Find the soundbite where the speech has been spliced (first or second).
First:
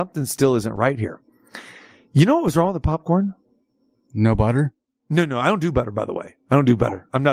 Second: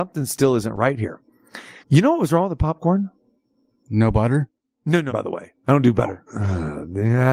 second